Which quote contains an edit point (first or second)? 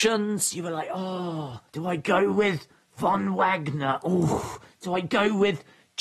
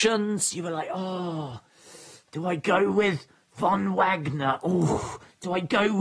first